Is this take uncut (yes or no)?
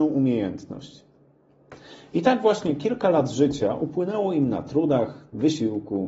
yes